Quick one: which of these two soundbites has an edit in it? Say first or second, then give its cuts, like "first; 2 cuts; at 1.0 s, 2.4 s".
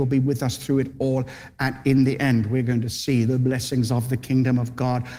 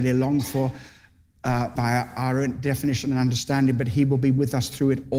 second; 1 cut; at 1.8 s